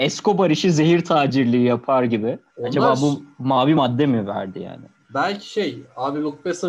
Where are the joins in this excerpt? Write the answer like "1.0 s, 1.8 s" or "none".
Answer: 2.5 s